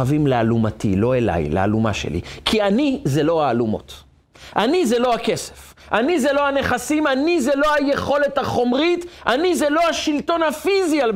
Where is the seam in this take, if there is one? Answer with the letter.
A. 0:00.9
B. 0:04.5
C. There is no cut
C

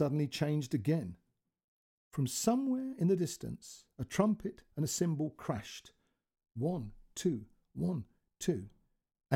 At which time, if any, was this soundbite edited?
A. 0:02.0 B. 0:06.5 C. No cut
A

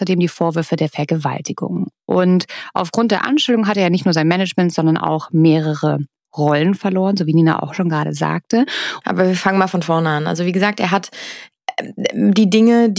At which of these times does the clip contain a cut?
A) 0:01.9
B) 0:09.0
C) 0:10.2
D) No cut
B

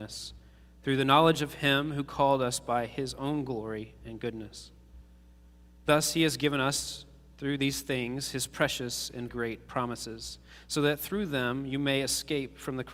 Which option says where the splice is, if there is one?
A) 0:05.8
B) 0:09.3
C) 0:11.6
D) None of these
B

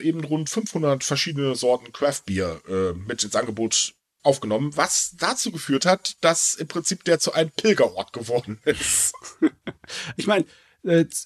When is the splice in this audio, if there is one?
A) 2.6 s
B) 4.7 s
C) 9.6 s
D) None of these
D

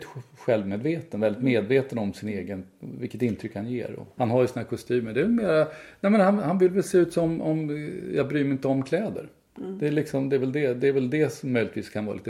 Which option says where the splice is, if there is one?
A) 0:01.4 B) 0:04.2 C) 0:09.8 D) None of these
B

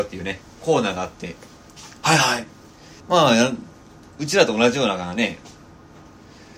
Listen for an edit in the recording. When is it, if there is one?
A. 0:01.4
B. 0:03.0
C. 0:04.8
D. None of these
B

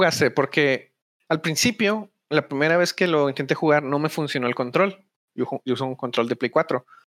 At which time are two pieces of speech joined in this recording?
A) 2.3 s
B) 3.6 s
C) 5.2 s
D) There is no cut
D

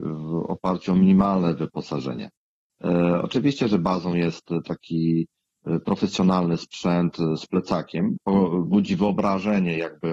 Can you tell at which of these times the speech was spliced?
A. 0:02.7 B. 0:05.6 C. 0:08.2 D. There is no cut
C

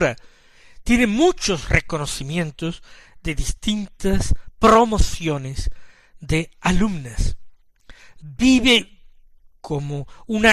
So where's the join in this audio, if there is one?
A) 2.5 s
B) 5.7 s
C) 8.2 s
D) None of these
C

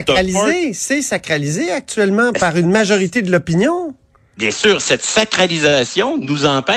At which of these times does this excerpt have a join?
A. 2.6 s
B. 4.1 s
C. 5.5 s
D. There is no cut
D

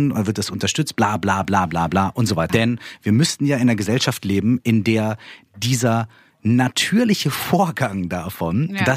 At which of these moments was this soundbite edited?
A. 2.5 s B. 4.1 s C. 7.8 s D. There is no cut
A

